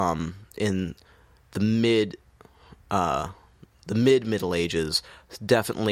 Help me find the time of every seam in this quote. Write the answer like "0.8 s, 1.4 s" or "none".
none